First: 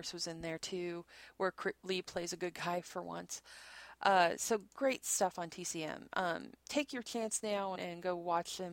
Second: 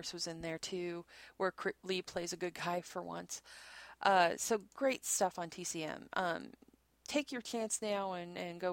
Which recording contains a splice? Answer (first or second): first